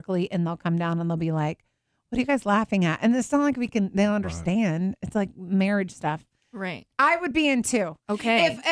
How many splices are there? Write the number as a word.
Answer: one